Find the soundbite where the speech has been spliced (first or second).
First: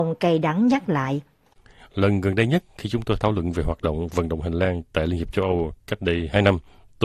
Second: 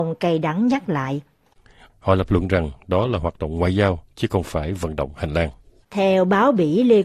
second